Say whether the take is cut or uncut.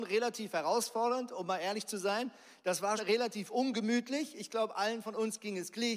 cut